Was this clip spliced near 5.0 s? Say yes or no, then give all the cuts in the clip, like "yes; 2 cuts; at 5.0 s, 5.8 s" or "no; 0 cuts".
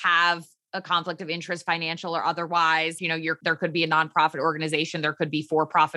no; 1 cut; at 3.0 s